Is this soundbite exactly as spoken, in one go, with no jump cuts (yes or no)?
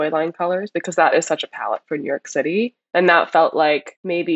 yes